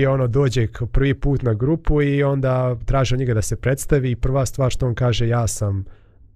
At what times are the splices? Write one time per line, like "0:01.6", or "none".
none